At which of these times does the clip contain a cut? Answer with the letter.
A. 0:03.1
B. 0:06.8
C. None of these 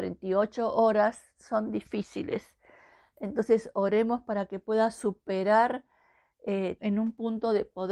B